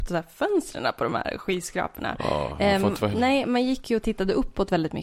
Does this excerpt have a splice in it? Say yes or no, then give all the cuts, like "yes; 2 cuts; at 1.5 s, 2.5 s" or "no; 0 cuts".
yes; 1 cut; at 3.1 s